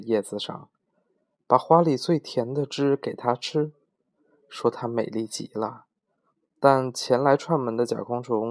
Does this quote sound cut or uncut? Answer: uncut